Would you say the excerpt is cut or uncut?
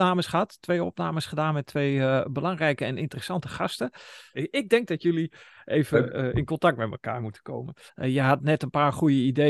cut